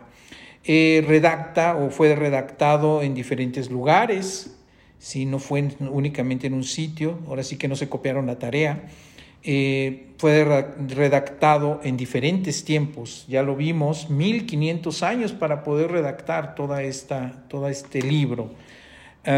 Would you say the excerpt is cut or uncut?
uncut